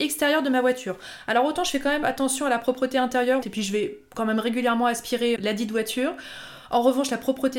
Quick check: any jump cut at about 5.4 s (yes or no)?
yes